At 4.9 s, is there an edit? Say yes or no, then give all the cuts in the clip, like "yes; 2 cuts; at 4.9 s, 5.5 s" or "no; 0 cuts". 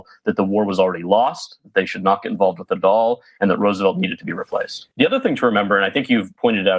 yes; 1 cut; at 4.9 s